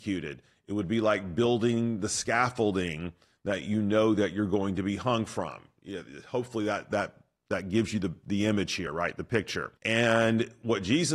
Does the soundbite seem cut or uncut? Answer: cut